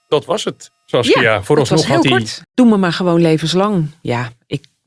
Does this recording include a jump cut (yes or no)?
yes